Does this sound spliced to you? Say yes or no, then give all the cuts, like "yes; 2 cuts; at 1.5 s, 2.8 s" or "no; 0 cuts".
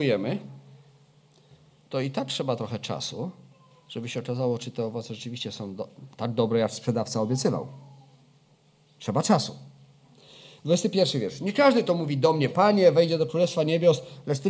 yes; 2 cuts; at 9.0 s, 12.5 s